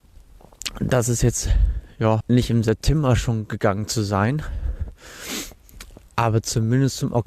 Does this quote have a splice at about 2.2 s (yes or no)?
yes